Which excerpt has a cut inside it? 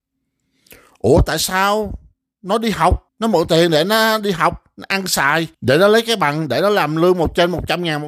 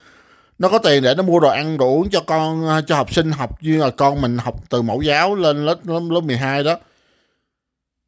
first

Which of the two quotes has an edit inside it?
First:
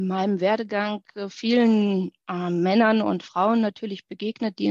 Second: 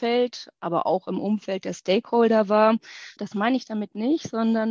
second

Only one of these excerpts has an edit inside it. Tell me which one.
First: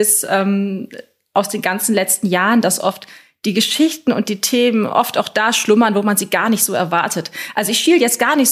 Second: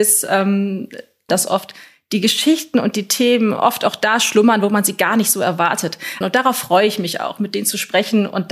second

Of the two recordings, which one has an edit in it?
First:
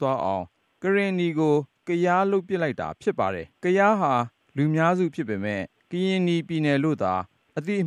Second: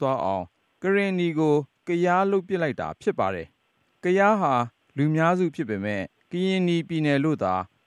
first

